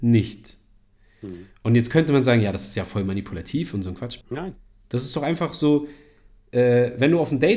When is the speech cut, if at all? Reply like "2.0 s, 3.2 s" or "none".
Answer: 4.2 s